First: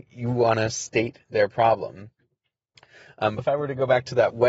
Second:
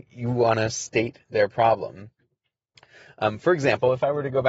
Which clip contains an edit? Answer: first; 1 cut; at 3.4 s

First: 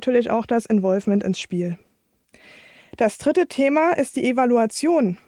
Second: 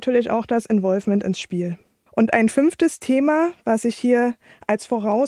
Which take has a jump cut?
second; 1 cut; at 2.1 s

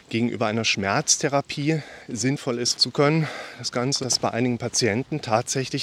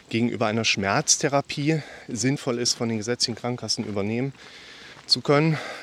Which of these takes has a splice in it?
first; 2 cuts; at 2.7 s, 4.0 s

